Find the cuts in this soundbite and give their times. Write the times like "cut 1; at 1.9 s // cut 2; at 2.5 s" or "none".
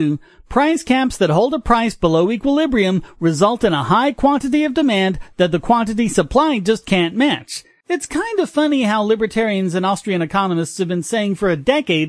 cut 1; at 7.8 s